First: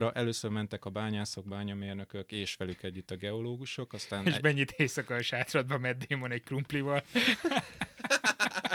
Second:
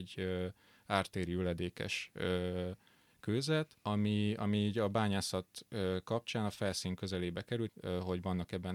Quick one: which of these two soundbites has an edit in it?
second; 2 cuts; at 3.8 s, 7.7 s

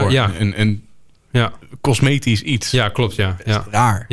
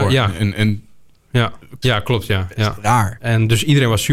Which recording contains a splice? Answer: second; 2 cuts; at 1.8 s, 3.2 s

